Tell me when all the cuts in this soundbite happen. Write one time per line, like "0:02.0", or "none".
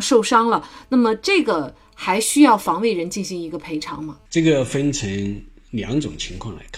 0:04.3